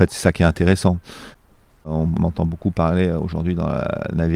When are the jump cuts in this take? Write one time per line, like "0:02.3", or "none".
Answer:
none